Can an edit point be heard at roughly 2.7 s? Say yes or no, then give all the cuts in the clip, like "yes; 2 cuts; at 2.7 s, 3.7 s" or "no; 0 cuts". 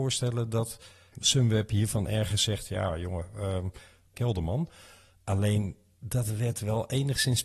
no; 2 cuts; at 1.1 s, 4.1 s